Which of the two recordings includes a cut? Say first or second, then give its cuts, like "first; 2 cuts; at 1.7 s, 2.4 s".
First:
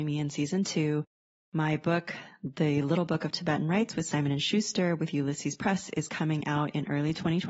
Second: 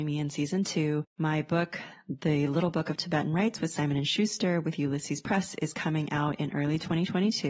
second; 1 cut; at 1.1 s